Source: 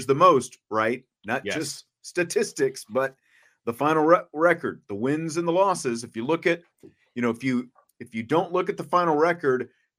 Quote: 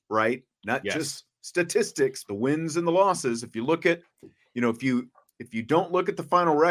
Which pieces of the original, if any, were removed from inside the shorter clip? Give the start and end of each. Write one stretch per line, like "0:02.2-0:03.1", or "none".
0:02.9-0:04.9